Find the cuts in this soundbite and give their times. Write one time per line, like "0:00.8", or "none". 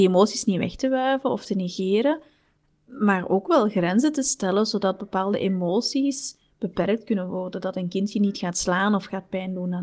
0:02.7